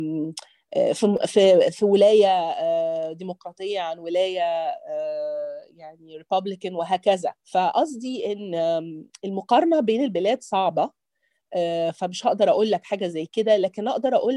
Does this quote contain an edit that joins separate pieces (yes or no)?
yes